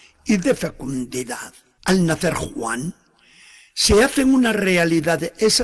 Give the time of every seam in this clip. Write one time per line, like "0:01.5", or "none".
0:01.8